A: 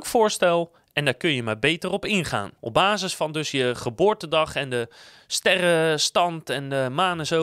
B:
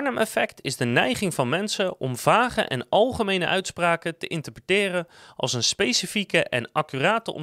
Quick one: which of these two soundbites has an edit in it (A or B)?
A